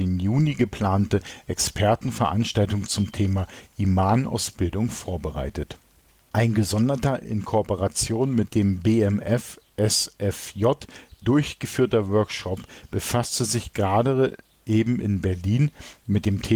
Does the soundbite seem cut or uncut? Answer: uncut